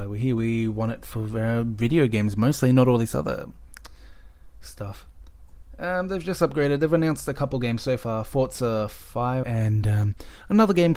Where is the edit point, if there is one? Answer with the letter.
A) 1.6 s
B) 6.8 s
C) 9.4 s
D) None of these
C